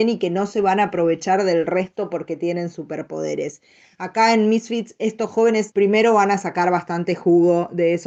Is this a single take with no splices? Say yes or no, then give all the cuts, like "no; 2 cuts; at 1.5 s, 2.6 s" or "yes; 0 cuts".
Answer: no; 1 cut; at 5.7 s